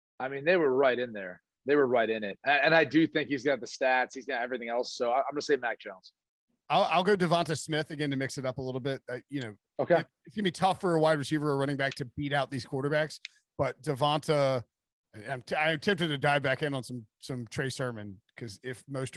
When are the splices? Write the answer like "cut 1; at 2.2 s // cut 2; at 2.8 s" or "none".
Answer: none